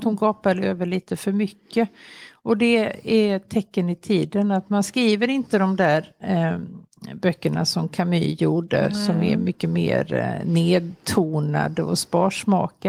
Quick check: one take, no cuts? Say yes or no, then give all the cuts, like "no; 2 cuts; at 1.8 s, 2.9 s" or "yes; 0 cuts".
yes; 0 cuts